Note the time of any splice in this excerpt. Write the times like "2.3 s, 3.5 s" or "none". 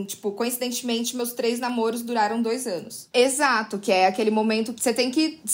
3.1 s